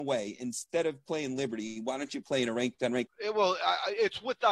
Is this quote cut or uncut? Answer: cut